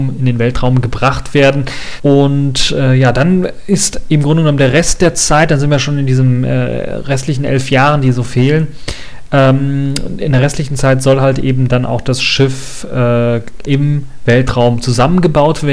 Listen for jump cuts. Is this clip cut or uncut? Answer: cut